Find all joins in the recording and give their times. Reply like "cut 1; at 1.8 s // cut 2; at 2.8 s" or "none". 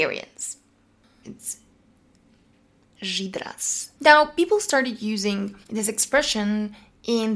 cut 1; at 1.2 s // cut 2; at 3.9 s // cut 3; at 5.6 s